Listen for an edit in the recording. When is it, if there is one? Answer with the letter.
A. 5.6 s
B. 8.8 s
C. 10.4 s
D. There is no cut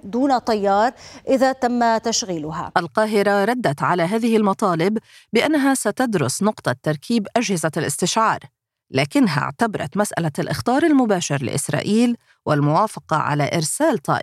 D